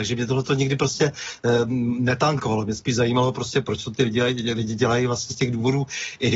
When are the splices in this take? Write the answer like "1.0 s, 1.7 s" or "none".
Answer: none